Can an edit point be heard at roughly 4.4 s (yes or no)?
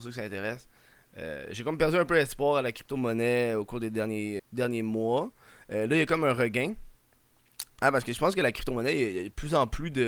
yes